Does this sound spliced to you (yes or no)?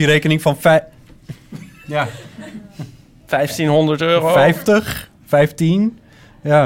no